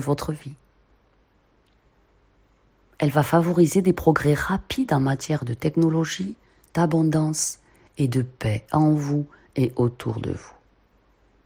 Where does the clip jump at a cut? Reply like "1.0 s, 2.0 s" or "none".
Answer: 6.6 s